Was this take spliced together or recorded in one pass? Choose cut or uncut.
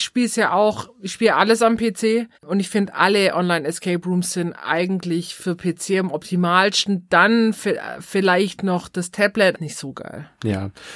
cut